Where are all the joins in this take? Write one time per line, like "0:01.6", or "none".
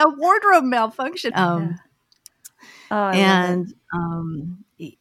0:01.3